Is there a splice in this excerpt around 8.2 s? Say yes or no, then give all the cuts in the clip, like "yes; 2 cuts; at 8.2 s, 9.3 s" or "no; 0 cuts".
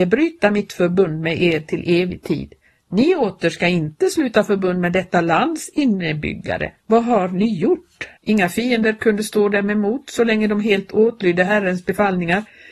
yes; 2 cuts; at 6.8 s, 8.2 s